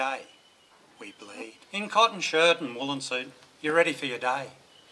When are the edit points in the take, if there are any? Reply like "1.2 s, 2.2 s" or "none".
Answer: 1.6 s